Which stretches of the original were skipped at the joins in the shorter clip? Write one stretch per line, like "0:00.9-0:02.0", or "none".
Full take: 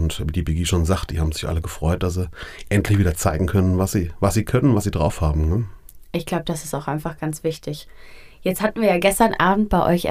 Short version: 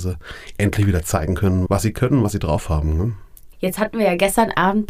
0:03.8-0:04.2
0:06.0-0:08.4